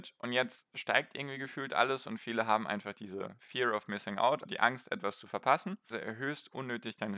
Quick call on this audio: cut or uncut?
cut